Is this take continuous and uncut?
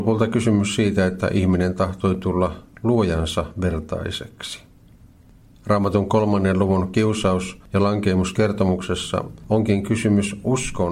yes; 0 cuts

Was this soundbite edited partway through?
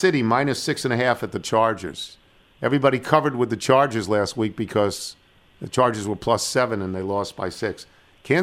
no; 0 cuts

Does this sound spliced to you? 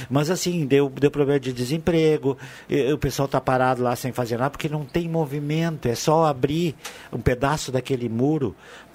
no; 0 cuts

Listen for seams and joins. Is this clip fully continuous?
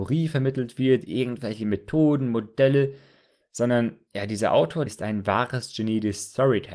no; 1 cut; at 4.9 s

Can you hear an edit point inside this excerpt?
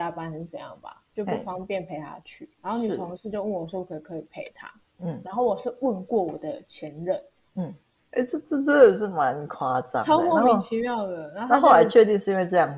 yes; 1 cut; at 8.0 s

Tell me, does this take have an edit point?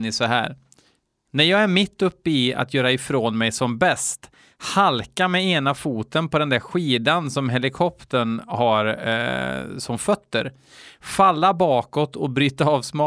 no; 0 cuts

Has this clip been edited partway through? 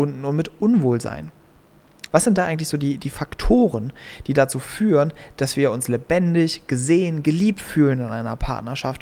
yes; 1 cut; at 2.1 s

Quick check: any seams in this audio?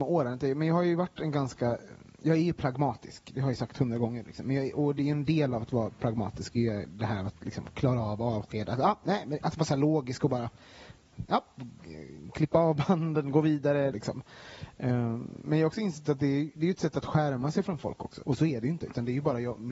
yes; 2 cuts; at 13.9 s, 18.2 s

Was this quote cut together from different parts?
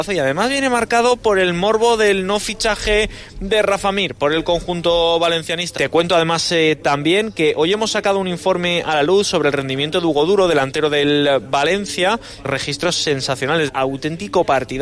yes; 3 cuts; at 5.8 s, 12.4 s, 13.7 s

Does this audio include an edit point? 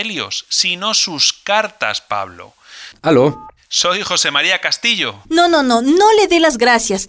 yes; 2 cuts; at 2.9 s, 5.2 s

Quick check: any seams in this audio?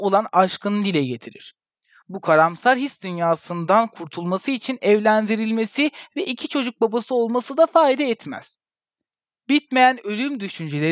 no; 0 cuts

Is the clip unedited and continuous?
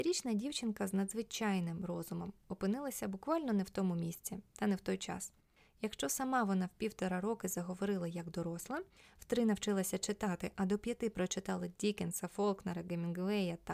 yes; 0 cuts

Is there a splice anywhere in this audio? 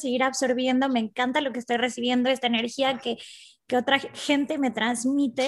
no; 0 cuts

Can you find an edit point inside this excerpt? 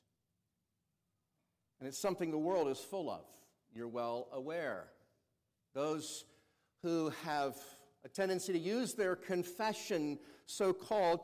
no; 0 cuts

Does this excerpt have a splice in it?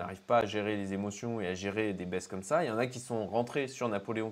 no; 0 cuts

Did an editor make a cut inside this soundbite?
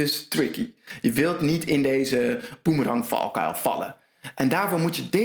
no; 0 cuts

